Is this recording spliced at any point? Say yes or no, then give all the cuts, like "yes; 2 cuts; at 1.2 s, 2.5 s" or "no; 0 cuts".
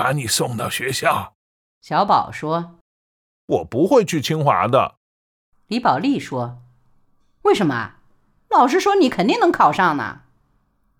no; 0 cuts